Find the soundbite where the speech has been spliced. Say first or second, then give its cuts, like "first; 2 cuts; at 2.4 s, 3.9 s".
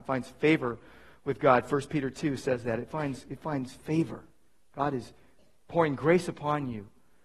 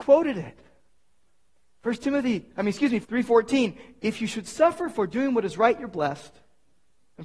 second; 1 cut; at 3.0 s